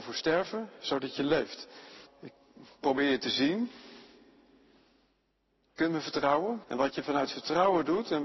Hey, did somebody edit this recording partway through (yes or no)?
yes